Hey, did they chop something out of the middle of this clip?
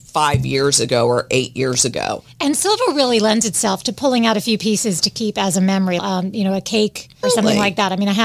yes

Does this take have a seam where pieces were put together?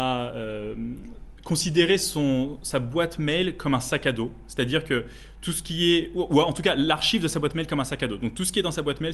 no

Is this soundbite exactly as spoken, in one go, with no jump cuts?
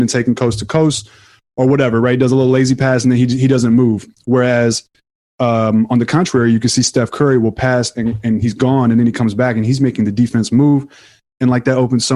yes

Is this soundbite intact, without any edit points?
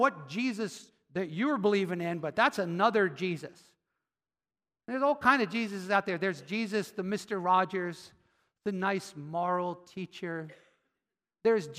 yes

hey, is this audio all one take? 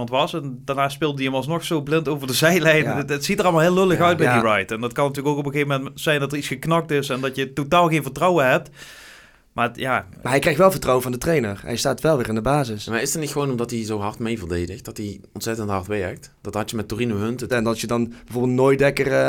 no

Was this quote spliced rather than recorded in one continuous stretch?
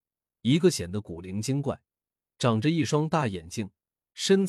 no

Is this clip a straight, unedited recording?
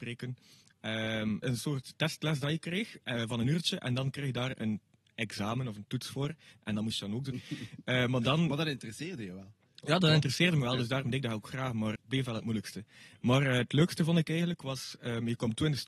no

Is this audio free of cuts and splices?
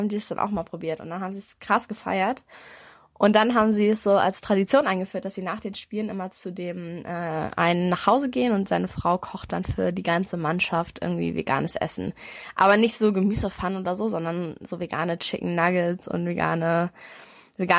yes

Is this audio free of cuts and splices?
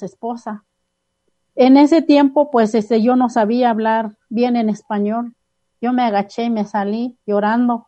no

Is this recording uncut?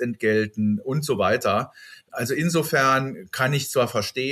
yes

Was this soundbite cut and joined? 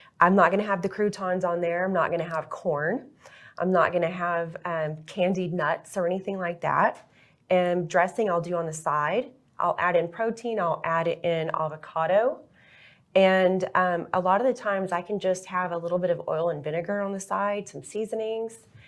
no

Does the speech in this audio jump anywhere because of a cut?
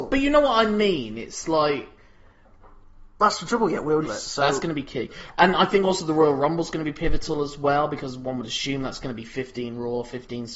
yes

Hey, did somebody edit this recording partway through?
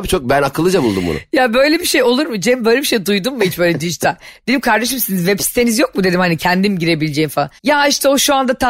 yes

